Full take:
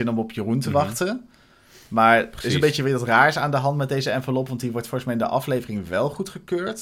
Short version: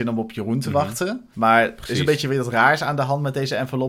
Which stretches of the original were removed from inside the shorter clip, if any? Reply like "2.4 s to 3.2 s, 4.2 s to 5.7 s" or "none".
1.3 s to 1.9 s